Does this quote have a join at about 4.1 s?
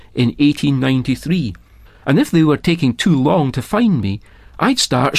no; 1 cut; at 1.9 s

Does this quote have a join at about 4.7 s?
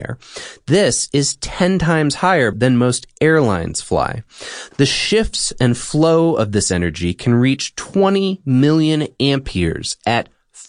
yes; 2 cuts; at 2.5 s, 4.7 s

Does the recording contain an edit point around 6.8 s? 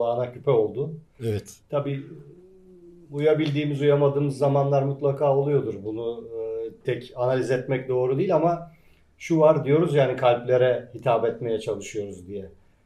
yes; 1 cut; at 6.8 s

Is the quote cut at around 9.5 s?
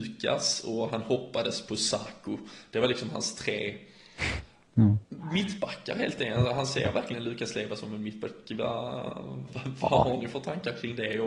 yes; 1 cut; at 9.5 s

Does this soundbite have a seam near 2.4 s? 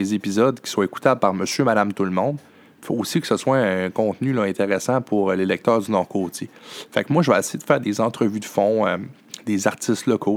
no; 0 cuts

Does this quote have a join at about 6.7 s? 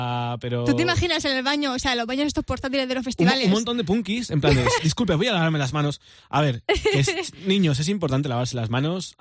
no; 1 cut; at 4.8 s

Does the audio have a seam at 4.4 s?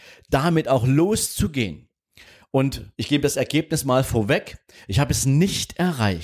no; 1 cut; at 2.9 s

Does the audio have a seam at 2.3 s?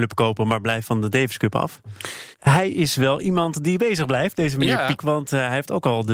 yes; 2 cuts; at 2.3 s, 5.0 s

